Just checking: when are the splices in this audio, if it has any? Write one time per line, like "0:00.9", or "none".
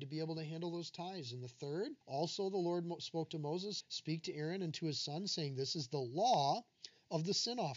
0:02.0
0:03.8